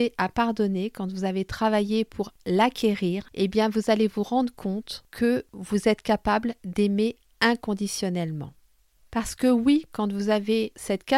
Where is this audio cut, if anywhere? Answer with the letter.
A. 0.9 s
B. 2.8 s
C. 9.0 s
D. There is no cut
C